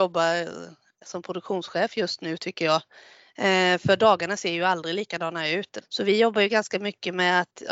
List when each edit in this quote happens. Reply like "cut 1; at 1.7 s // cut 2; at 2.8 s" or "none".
cut 1; at 5.8 s